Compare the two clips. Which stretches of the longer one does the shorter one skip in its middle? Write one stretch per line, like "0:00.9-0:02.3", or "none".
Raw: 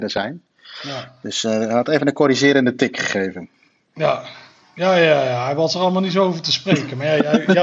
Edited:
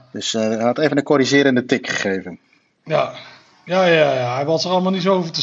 none